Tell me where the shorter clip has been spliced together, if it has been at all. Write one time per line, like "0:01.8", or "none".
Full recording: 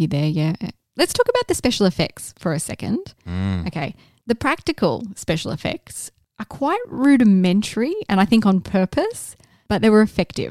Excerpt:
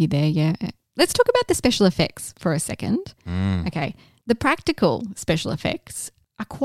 none

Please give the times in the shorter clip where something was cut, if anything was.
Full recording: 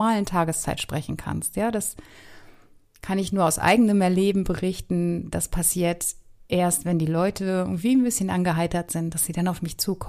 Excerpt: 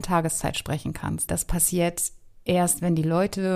0:01.3

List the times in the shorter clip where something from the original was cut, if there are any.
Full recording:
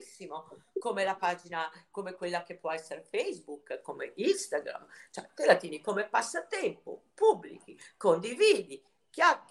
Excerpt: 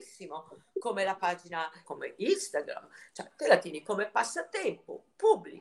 0:01.8

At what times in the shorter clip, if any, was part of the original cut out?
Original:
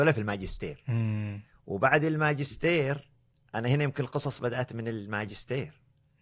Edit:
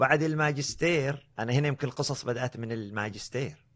0:01.3

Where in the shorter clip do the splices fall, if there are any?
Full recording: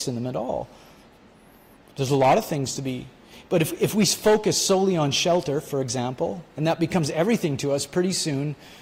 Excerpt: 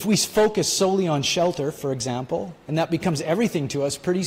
none

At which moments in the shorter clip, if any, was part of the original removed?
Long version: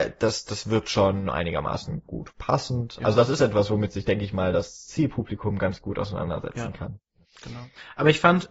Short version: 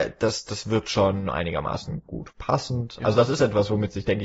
none

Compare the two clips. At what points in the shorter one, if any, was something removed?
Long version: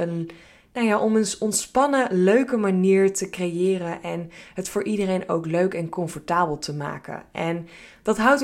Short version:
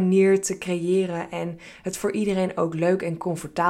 none

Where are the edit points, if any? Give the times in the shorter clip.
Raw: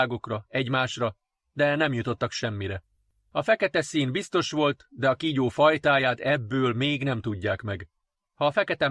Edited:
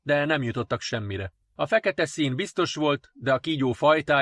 0:01.4

